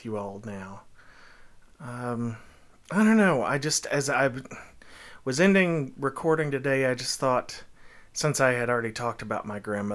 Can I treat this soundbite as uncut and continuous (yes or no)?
no